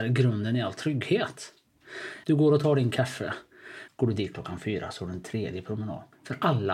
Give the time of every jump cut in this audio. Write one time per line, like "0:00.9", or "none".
0:02.2
0:03.9